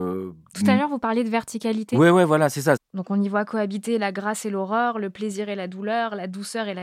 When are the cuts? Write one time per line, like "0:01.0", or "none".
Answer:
0:02.8